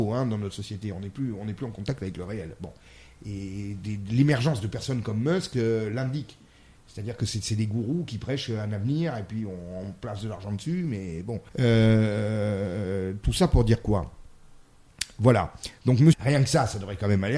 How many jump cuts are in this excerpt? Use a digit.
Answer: 2